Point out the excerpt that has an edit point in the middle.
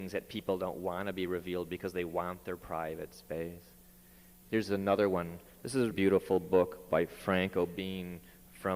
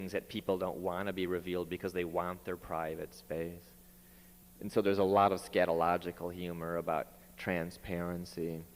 first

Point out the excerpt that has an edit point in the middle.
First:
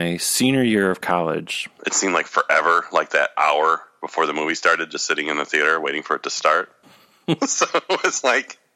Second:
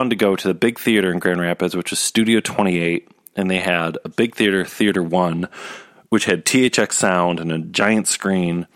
first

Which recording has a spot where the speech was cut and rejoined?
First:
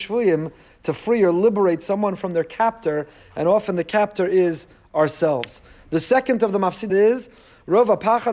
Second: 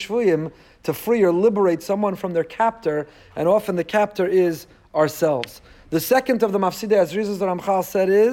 first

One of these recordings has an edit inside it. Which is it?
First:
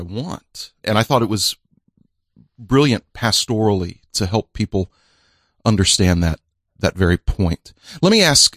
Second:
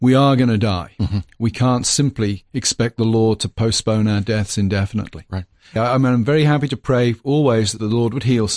second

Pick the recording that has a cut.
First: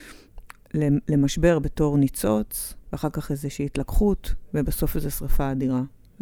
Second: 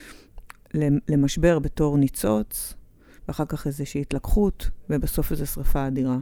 first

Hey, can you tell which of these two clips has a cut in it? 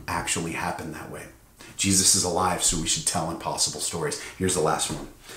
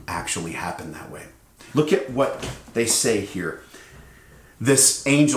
second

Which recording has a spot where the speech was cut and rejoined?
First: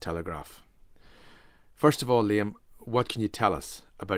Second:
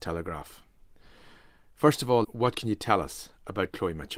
second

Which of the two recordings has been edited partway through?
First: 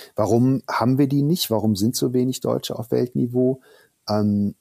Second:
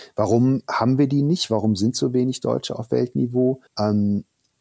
second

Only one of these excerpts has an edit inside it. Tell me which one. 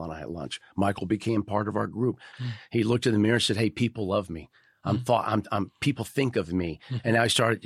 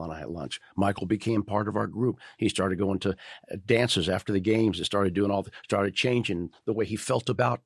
first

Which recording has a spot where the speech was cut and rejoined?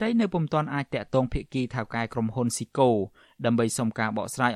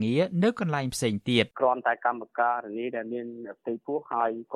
second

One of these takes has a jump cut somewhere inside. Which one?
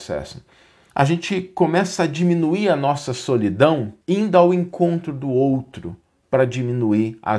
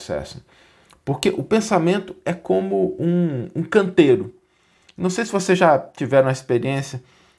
first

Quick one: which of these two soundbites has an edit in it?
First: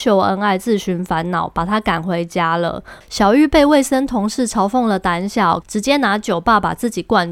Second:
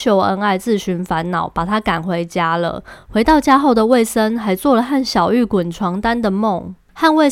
first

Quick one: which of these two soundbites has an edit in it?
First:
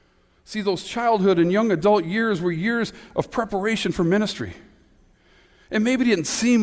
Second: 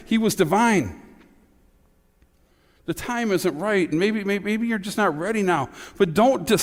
second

